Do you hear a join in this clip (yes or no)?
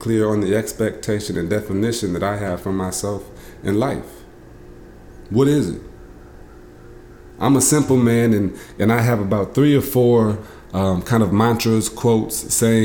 no